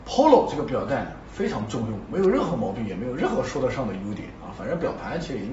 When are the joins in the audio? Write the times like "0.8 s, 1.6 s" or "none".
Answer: none